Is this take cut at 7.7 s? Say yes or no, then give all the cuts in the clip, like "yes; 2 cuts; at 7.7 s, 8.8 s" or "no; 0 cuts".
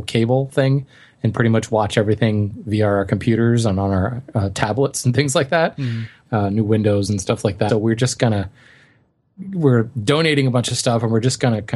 yes; 2 cuts; at 6.3 s, 7.7 s